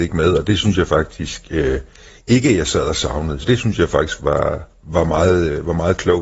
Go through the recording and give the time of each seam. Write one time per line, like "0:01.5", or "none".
0:03.4
0:04.8